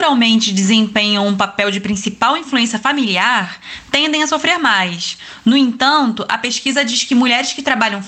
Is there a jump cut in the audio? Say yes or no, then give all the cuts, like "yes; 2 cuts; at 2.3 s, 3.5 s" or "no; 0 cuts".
no; 0 cuts